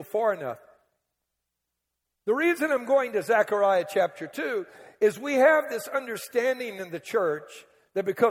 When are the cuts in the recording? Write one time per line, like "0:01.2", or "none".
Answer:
0:02.2